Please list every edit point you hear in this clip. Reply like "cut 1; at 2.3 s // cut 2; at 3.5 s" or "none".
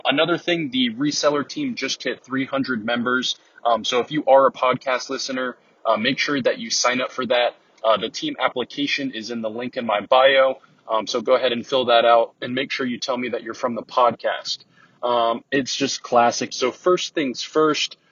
cut 1; at 15.4 s // cut 2; at 16.5 s